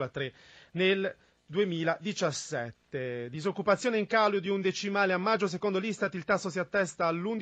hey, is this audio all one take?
yes; 0 cuts

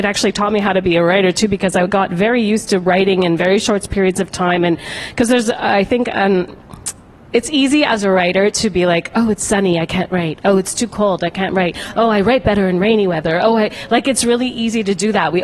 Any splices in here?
no; 0 cuts

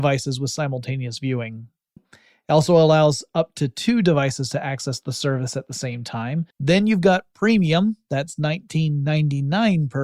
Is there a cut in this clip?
yes; 2 cuts; at 2.0 s, 6.5 s

